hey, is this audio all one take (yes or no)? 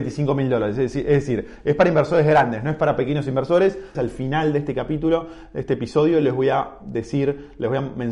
no